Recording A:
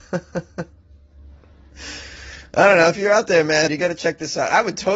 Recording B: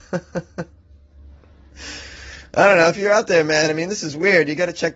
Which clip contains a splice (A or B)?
A